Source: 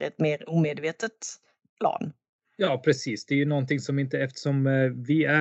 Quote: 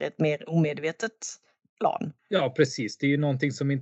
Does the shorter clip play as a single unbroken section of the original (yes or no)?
no